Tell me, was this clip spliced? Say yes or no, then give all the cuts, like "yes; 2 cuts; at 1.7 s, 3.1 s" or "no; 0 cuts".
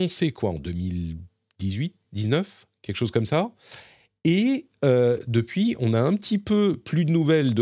no; 0 cuts